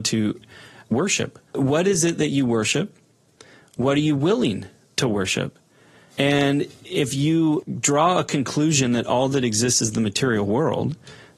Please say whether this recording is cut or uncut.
cut